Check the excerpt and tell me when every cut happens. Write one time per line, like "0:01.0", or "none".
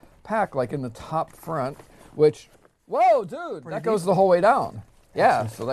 none